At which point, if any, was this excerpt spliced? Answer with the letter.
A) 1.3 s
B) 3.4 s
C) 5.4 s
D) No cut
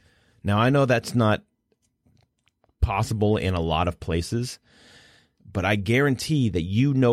C